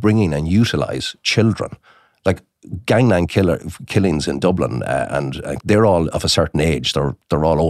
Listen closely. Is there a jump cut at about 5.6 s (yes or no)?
yes